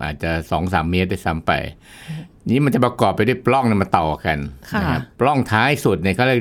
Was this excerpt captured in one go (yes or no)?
no